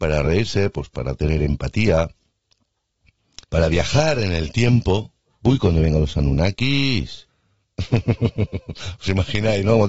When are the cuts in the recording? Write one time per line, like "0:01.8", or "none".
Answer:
0:03.4
0:07.3

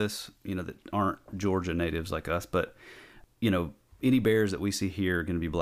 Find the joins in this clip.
none

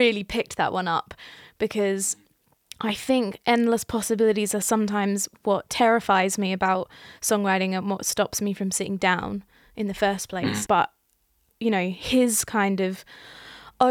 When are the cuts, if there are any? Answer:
0:10.7

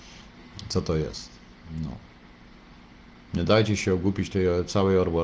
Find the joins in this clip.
none

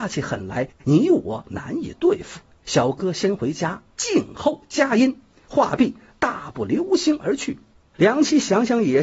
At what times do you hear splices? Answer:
none

